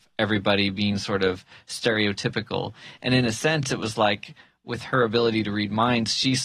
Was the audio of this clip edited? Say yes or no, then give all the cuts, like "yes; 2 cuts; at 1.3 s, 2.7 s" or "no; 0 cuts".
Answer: no; 0 cuts